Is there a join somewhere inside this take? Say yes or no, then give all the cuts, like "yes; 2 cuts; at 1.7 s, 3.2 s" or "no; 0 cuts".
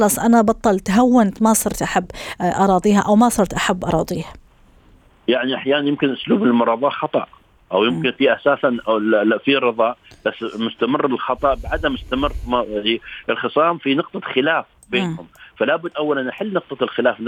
no; 0 cuts